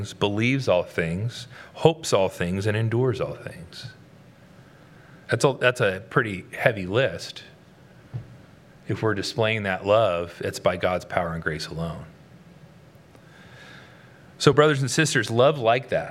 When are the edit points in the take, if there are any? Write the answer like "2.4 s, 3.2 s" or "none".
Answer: none